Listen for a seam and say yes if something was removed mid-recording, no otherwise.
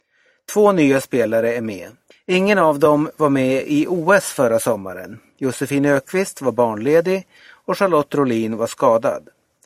yes